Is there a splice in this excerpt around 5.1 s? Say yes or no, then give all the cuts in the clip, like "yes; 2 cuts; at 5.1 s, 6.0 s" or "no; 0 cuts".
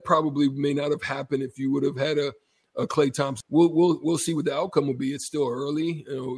no; 1 cut; at 3.4 s